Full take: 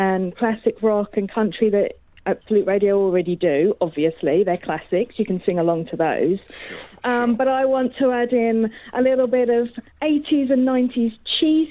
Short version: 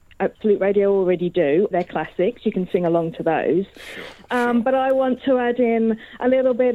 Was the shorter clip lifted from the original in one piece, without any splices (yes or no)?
no